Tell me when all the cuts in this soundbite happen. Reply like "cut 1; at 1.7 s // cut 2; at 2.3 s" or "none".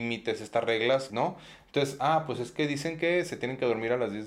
cut 1; at 1.1 s